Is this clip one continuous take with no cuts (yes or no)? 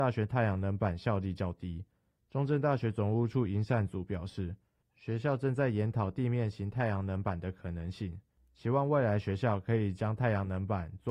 no